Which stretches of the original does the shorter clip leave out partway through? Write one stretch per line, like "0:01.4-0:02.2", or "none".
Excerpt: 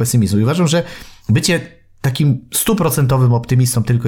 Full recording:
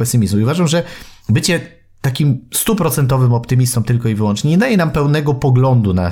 none